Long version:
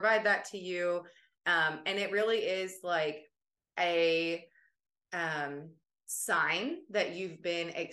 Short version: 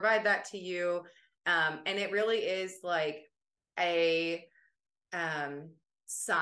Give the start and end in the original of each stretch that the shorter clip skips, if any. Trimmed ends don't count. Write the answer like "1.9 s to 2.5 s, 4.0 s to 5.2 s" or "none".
none